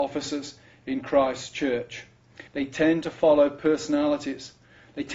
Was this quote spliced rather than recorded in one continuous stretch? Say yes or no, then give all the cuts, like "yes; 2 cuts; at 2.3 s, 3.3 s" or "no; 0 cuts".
yes; 1 cut; at 2.5 s